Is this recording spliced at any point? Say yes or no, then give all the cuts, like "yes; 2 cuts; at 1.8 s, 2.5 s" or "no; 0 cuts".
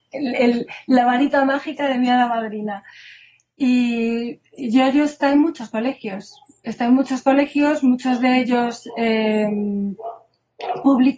no; 0 cuts